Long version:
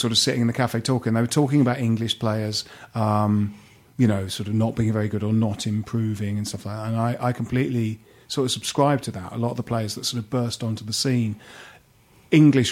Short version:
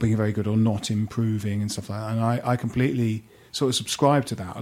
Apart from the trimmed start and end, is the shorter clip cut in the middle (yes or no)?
no